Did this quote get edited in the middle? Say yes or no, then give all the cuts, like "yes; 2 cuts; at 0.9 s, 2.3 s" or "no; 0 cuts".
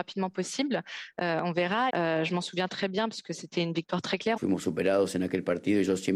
yes; 2 cuts; at 1.9 s, 4.4 s